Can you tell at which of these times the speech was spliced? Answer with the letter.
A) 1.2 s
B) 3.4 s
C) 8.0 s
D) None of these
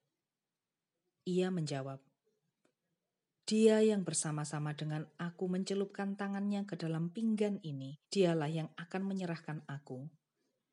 C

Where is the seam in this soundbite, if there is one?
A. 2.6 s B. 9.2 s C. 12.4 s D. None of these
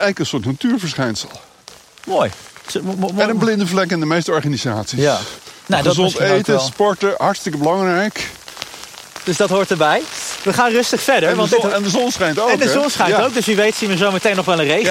B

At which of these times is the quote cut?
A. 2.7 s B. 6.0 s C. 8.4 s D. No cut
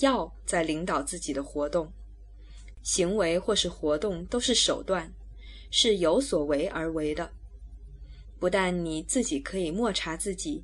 A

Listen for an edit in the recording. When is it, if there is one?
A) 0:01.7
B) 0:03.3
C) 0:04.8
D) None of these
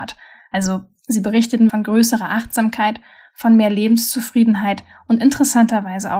A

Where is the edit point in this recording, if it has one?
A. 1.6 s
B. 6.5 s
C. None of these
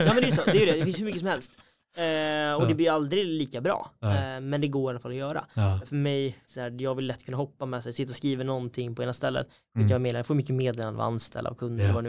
B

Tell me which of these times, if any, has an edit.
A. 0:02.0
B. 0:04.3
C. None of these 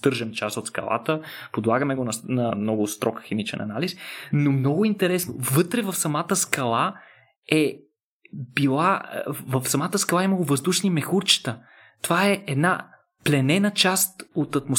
B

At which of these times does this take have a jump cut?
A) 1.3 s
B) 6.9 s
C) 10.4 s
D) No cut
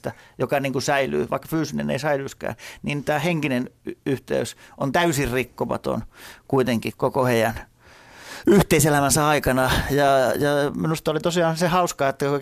B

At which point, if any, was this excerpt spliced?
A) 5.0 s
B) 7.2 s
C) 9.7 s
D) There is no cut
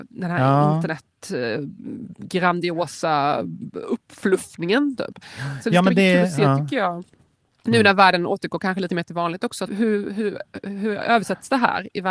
C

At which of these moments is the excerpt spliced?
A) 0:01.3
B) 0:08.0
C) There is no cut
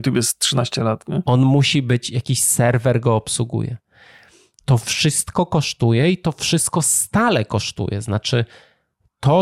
A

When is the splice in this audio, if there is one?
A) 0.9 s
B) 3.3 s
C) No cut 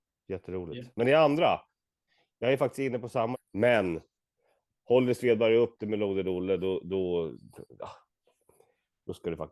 B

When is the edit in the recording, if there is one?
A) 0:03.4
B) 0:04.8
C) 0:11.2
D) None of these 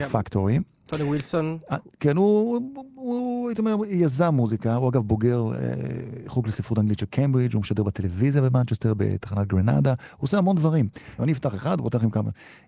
C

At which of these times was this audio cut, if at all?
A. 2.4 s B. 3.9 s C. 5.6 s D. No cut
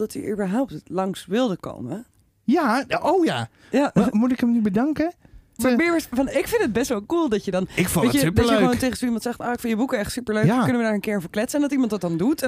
C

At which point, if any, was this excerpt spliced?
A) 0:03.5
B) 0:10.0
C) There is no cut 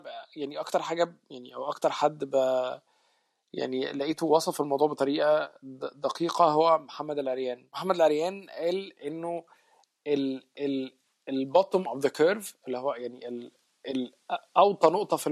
C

